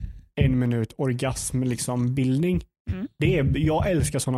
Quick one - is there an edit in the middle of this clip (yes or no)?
no